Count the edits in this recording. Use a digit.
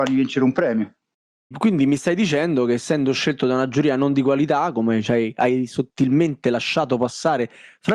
1